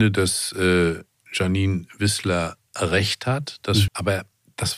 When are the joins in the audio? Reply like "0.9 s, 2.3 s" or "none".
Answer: 3.9 s